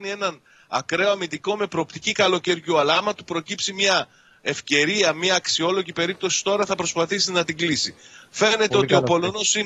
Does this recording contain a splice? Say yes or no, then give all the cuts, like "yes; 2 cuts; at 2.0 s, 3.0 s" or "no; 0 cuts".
no; 0 cuts